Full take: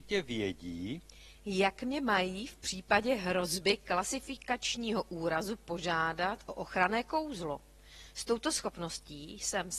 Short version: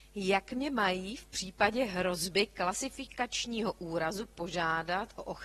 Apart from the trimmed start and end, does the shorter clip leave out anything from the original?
no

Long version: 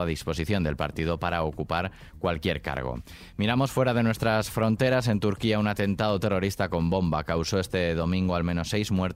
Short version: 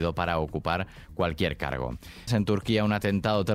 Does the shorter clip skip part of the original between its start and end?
yes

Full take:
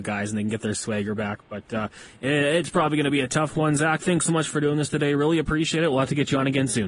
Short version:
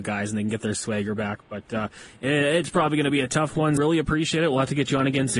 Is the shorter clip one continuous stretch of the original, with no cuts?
no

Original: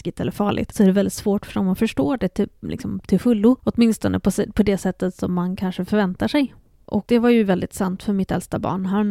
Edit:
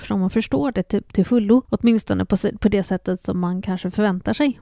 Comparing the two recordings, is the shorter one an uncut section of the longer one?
no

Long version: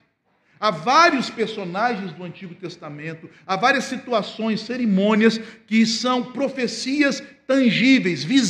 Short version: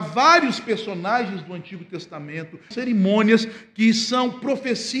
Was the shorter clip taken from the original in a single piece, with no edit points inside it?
no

